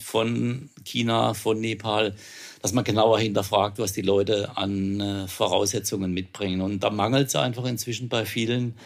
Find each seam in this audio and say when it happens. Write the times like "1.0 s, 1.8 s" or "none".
none